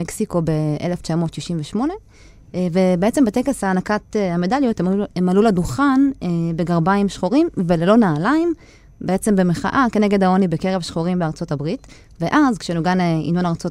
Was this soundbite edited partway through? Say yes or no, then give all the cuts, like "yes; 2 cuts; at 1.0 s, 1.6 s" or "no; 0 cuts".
no; 0 cuts